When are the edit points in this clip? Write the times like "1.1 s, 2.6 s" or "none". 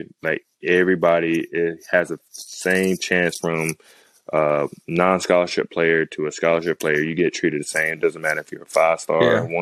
none